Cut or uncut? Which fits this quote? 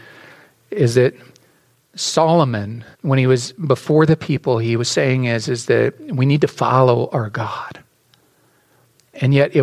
cut